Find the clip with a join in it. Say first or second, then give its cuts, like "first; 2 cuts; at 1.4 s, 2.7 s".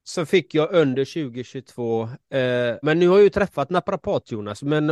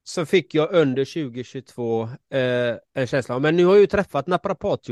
first; 1 cut; at 2.8 s